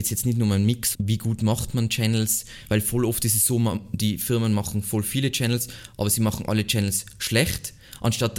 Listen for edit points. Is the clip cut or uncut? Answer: cut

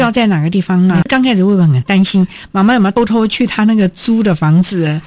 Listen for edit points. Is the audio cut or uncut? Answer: cut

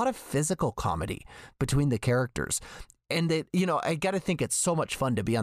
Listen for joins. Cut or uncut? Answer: cut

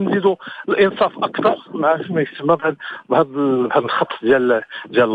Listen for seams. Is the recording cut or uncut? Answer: cut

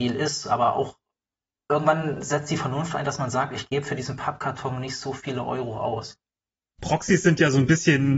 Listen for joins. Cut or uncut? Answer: uncut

